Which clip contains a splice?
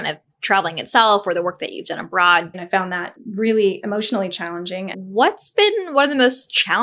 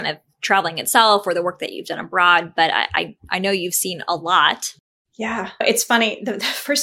first; 2 cuts; at 2.5 s, 4.9 s

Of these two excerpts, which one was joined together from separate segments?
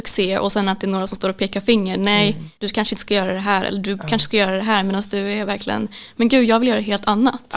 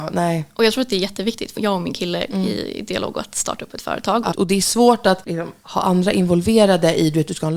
second; 2 cuts; at 1.6 s, 4.3 s

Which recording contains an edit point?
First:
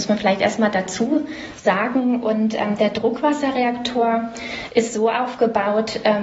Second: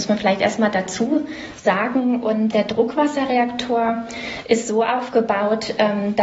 second; 1 cut; at 2.5 s

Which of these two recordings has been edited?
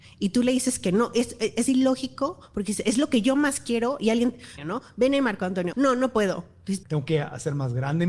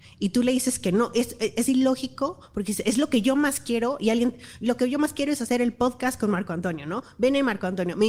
first; 3 cuts; at 4.6 s, 5.7 s, 6.8 s

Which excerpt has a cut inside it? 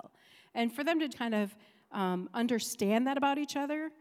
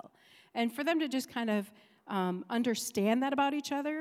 first; 1 cut; at 1.1 s

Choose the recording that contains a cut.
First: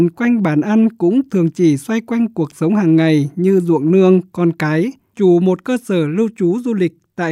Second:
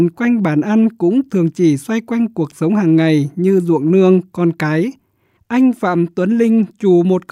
first; 1 cut; at 5.1 s

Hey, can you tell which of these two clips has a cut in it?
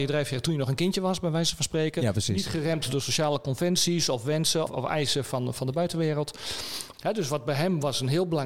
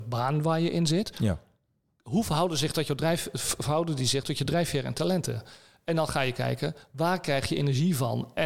first; 2 cuts; at 4.7 s, 6.9 s

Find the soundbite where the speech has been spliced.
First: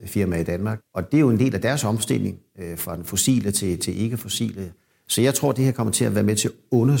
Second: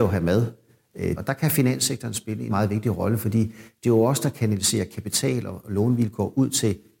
second; 2 cuts; at 1.2 s, 2.5 s

